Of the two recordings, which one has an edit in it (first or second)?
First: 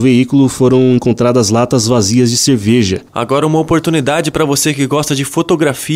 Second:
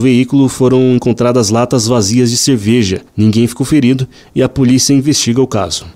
first